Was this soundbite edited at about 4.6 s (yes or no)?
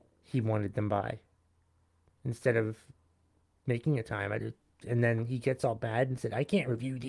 no